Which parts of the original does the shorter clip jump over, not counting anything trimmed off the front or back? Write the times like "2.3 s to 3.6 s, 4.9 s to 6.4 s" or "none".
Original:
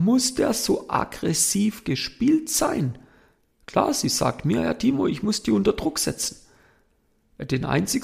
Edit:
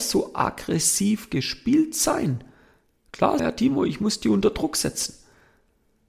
3.9 s to 4.6 s

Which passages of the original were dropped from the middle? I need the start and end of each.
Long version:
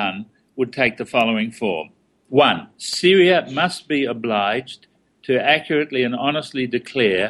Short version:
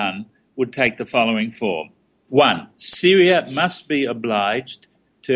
none

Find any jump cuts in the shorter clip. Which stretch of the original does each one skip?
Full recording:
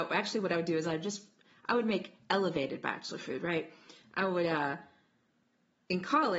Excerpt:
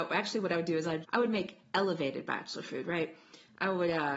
1.0 s to 1.6 s

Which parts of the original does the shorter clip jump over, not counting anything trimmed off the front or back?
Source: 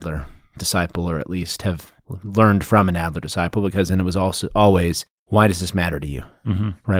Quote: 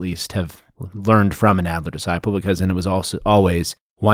none

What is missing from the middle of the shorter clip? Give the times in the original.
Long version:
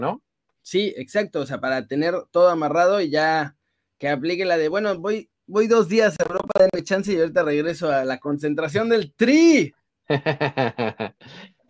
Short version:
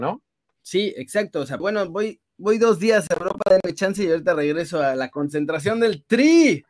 1.6 s to 4.7 s

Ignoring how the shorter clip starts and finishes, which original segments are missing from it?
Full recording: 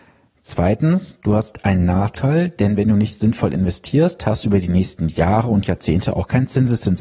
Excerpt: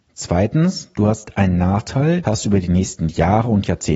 2.5 s to 4.2 s

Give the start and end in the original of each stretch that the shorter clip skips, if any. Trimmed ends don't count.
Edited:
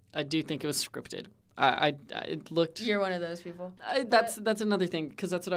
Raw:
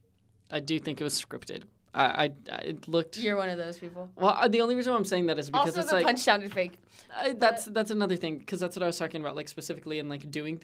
4.1 s to 7.1 s

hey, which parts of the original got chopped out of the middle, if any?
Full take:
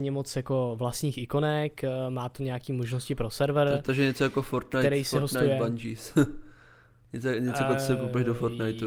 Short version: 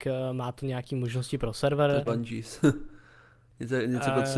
3.8 s to 5.6 s

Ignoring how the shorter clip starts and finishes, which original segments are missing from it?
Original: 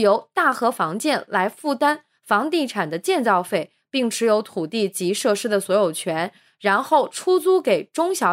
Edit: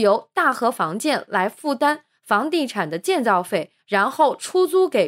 3.8 s to 6.5 s

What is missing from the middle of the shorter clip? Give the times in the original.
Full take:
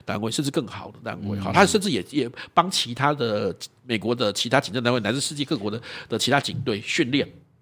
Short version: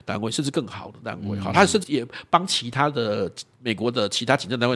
1.8 s to 2.1 s

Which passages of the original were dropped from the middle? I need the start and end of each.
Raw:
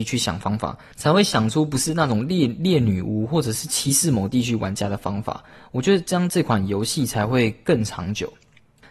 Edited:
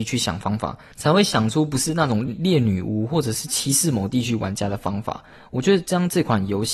2.3 s to 2.5 s

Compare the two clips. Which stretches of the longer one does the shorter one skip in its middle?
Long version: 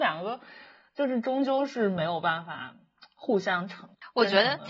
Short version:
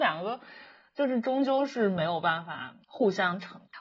2.8 s to 3.1 s

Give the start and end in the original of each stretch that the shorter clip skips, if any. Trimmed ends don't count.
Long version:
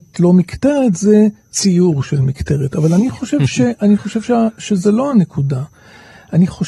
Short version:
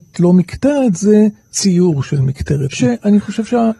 2.7 s to 3.5 s

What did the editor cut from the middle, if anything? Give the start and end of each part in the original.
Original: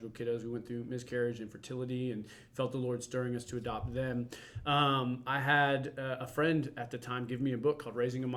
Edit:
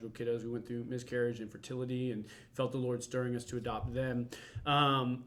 none

